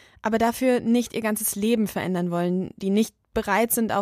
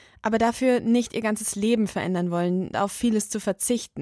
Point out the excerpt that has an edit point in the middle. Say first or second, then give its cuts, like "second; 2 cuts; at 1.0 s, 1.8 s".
second; 1 cut; at 2.7 s